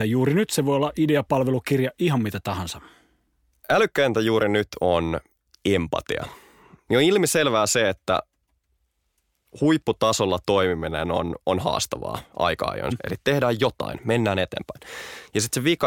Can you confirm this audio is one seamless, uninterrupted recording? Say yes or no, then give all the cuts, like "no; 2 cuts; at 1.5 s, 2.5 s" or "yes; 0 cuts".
no; 2 cuts; at 6.9 s, 12.9 s